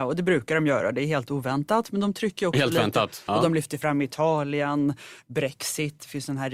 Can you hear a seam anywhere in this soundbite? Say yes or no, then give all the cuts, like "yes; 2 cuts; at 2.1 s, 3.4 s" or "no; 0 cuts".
yes; 1 cut; at 3.3 s